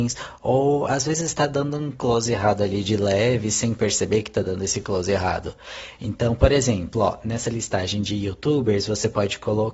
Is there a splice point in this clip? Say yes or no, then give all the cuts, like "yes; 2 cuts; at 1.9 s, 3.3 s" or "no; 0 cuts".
no; 0 cuts